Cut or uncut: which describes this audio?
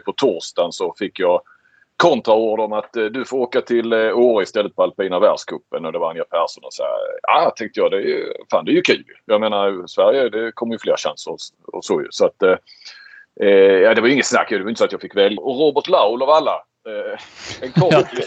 cut